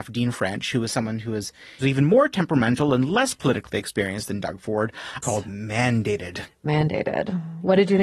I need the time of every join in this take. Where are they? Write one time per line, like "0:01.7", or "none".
0:01.8
0:05.2